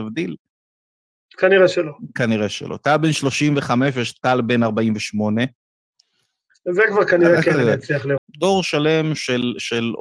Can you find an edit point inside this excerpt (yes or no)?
yes